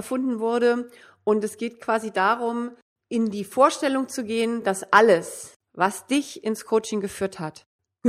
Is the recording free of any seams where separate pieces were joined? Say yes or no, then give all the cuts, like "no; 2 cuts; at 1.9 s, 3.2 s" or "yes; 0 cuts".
yes; 0 cuts